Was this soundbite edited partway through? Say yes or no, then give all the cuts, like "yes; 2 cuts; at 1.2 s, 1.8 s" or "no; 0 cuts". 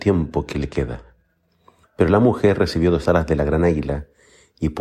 yes; 1 cut; at 1.8 s